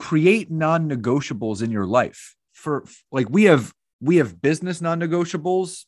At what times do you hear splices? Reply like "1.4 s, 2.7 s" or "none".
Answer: 2.5 s